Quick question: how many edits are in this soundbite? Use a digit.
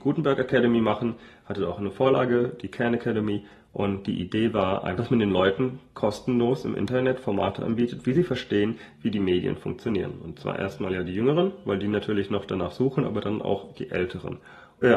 0